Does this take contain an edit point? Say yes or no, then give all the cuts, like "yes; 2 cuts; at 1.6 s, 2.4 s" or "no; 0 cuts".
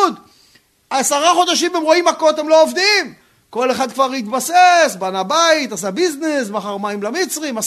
no; 0 cuts